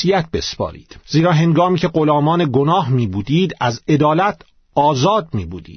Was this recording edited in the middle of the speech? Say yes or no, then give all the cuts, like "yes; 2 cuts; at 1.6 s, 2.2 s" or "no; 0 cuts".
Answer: yes; 1 cut; at 1.0 s